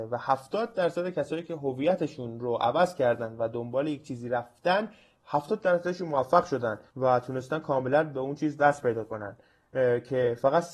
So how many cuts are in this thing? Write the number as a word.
one